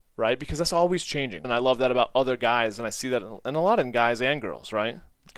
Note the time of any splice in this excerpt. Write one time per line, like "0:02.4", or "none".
0:01.4